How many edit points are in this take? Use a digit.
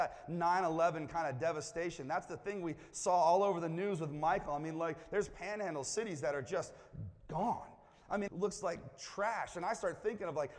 1